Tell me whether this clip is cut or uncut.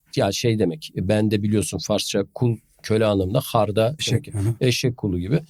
cut